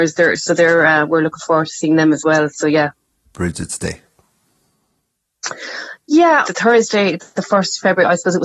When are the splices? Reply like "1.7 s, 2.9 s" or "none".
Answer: 3.3 s, 6.4 s